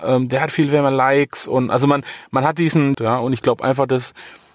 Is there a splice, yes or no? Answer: yes